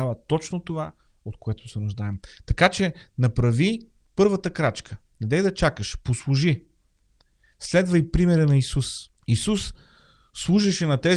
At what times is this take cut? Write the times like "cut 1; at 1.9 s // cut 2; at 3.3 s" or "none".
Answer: cut 1; at 9.2 s

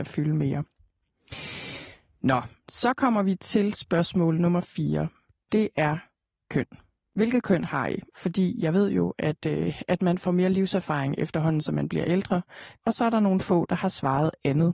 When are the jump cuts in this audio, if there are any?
cut 1; at 8.1 s // cut 2; at 12.8 s

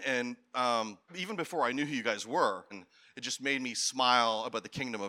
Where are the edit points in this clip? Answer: cut 1; at 1.1 s // cut 2; at 2.7 s

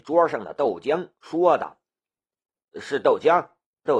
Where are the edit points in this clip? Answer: cut 1; at 2.7 s

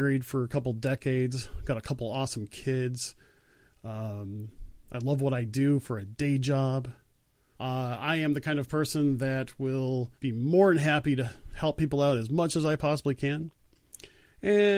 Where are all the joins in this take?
cut 1; at 7.5 s // cut 2; at 10.2 s

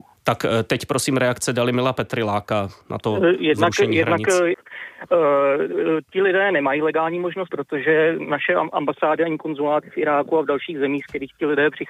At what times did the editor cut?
cut 1; at 4.5 s // cut 2; at 7.5 s

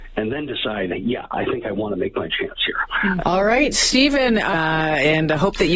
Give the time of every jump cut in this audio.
cut 1; at 3.2 s // cut 2; at 4.5 s

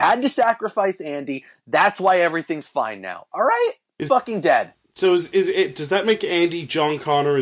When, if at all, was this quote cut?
cut 1; at 4.1 s

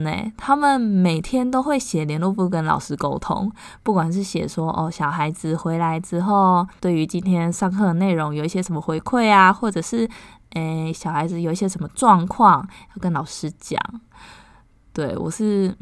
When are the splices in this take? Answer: none

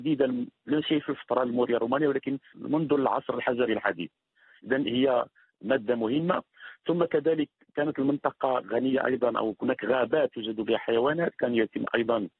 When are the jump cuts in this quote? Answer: cut 1; at 2.5 s

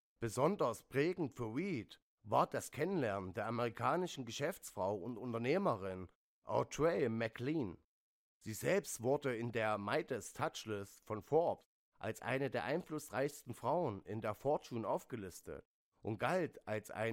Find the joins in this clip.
none

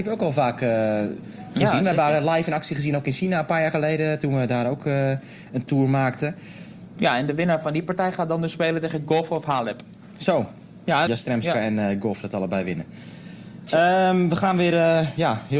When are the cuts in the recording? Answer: cut 1; at 6.9 s // cut 2; at 11.1 s

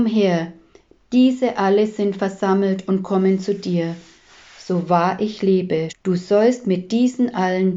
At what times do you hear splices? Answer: cut 1; at 5.9 s

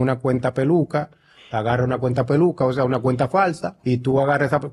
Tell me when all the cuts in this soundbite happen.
cut 1; at 3.8 s

